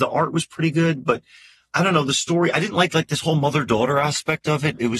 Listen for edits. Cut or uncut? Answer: uncut